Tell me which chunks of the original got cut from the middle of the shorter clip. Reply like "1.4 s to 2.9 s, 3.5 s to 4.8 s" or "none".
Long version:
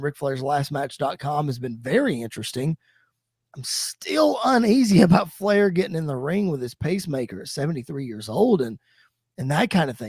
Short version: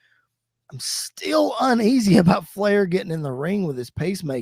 none